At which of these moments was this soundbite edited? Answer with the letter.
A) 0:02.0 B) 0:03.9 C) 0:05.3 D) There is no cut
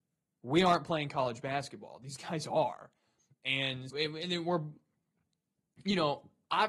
B